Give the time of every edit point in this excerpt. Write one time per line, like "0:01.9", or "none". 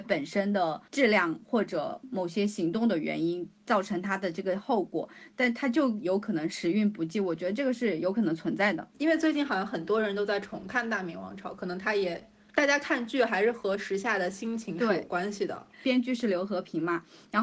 0:12.5
0:15.7